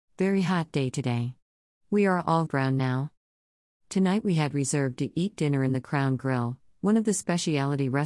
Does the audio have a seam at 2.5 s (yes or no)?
yes